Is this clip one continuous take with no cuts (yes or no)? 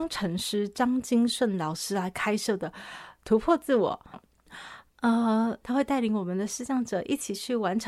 no